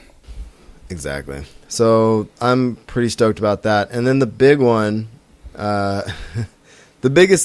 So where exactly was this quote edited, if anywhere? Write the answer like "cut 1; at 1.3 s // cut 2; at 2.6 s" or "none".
none